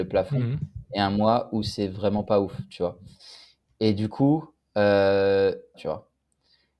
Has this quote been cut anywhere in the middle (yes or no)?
yes